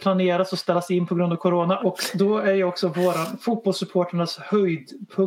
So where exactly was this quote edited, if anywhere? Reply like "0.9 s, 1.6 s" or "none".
1.8 s

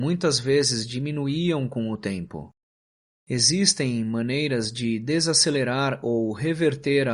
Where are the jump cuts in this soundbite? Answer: 3.1 s

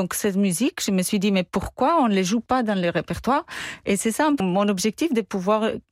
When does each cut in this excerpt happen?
4.4 s

